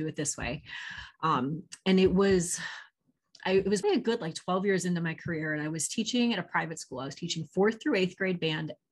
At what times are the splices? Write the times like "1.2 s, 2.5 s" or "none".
3.8 s